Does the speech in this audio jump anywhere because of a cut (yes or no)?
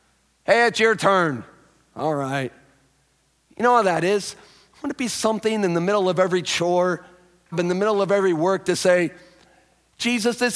yes